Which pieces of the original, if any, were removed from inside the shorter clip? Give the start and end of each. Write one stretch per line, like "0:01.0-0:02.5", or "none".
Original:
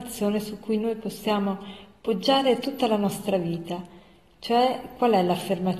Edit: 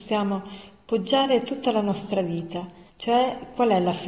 0:04.1-0:04.3

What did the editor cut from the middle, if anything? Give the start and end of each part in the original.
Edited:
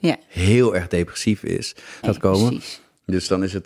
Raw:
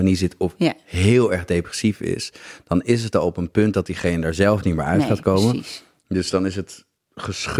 0:02.6-0:05.1

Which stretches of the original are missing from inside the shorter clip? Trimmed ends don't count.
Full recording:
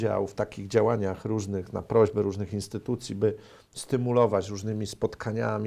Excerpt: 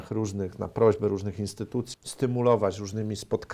0:03.1-0:03.6

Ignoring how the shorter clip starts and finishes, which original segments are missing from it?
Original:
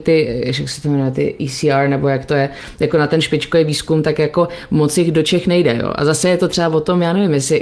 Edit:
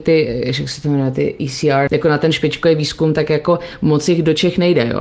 0:01.9-0:02.8

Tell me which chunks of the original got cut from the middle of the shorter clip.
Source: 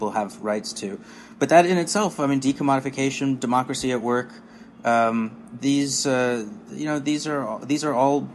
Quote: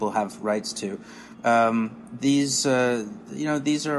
0:01.3-0:04.7

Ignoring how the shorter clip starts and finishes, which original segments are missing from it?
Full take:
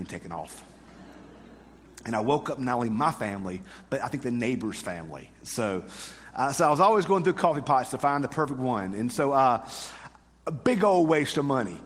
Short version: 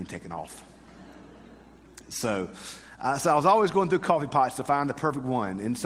0:02.0-0:05.4

